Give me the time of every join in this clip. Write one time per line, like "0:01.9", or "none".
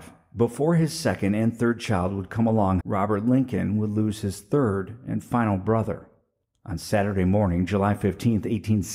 0:02.8